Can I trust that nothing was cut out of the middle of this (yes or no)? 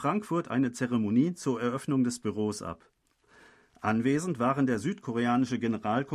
yes